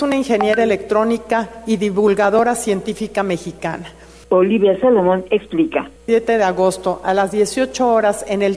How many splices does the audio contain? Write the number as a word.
two